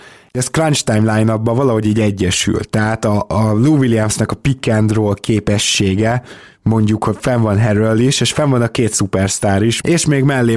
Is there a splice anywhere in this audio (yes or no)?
no